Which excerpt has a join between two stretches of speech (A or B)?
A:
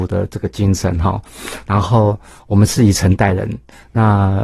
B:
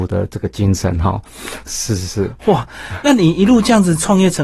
B